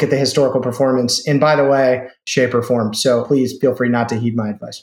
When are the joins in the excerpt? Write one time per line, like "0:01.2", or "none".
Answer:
0:02.2